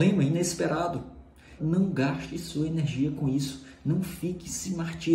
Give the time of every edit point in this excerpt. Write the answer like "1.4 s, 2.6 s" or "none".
1.6 s